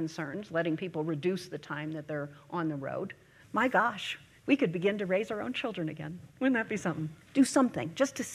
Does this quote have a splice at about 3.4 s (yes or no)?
yes